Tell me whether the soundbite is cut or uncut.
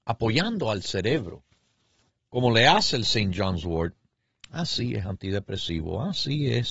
uncut